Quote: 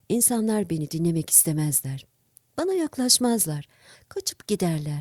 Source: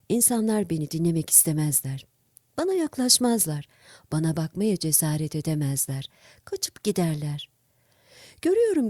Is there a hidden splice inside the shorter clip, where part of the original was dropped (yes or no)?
yes